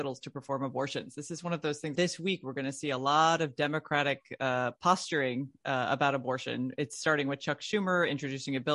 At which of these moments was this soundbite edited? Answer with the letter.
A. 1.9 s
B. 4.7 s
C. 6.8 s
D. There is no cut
A